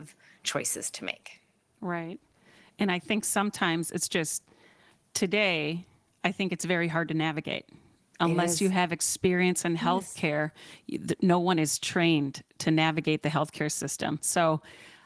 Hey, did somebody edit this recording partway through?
no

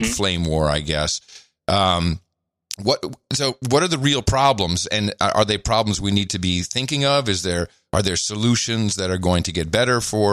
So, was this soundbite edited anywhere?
no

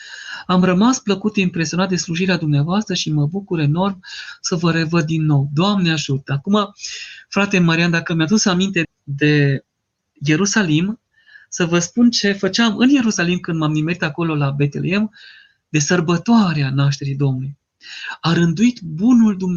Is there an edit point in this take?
yes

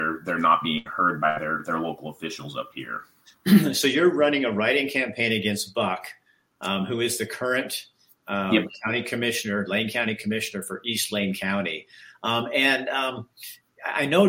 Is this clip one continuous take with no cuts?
yes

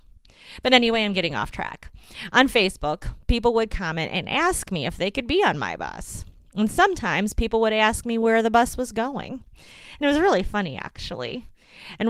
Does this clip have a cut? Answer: no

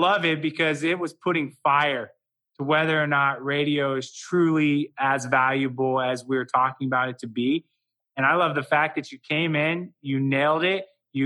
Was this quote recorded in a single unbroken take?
yes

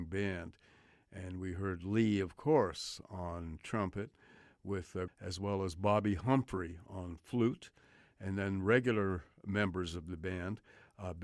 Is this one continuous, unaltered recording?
no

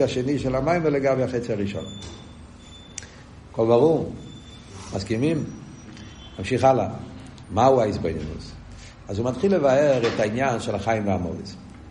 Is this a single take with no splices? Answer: no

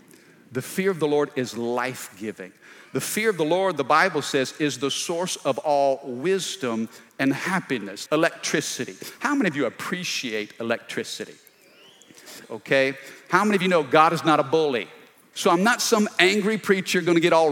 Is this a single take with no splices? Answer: no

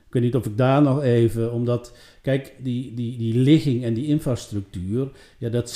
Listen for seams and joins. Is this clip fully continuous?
no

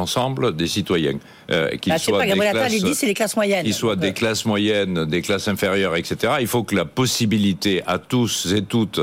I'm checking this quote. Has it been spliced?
no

